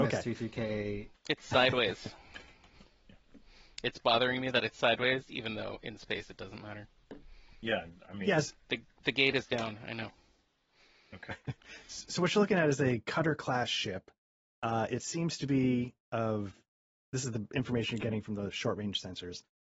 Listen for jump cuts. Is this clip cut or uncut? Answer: cut